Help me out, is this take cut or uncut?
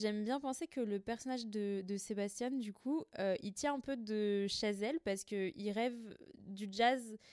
uncut